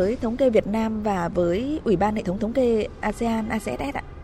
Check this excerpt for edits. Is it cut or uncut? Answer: uncut